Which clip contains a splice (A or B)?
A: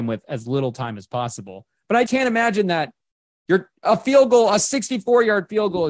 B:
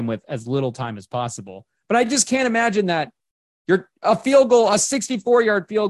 A